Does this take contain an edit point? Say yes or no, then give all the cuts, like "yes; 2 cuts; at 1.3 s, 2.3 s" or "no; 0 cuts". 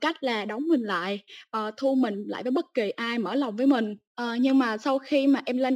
no; 0 cuts